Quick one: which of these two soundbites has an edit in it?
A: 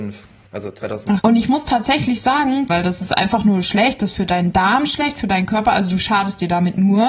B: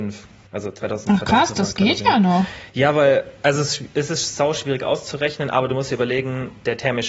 A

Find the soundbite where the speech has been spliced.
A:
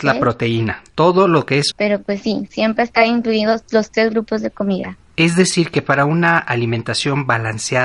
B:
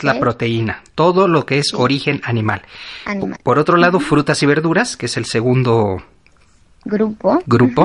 A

